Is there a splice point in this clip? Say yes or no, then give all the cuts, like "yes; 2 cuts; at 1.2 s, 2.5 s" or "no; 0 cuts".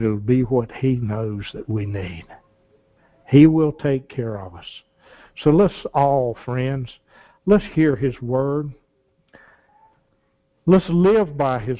no; 0 cuts